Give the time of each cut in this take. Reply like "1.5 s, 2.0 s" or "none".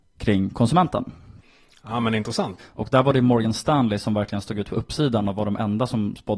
2.6 s